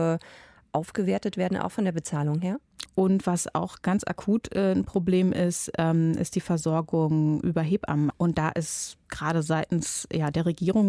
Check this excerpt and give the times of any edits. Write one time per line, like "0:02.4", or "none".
0:02.9
0:08.1